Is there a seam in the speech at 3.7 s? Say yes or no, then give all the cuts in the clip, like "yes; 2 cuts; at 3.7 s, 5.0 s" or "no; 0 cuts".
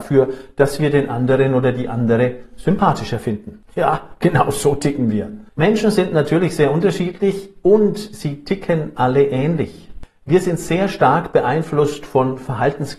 no; 1 cut; at 5.5 s